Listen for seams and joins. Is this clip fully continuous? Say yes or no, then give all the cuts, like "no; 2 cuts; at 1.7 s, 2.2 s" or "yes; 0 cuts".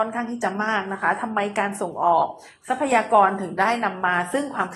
yes; 0 cuts